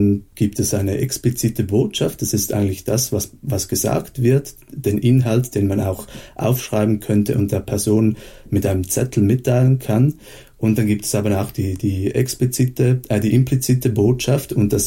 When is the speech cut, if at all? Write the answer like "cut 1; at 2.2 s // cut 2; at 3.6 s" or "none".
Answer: none